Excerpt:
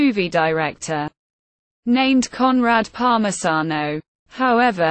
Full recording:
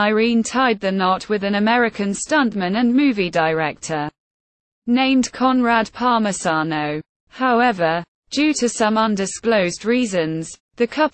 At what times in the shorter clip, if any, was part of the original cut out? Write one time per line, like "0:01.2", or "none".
none